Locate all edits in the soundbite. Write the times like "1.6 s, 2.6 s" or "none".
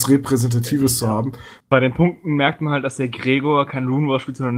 1.6 s